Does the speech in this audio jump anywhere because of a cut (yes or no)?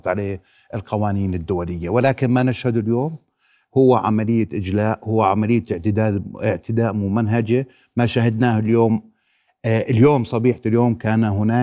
no